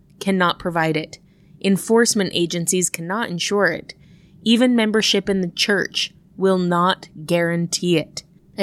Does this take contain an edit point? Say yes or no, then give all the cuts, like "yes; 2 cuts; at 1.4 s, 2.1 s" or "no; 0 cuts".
no; 0 cuts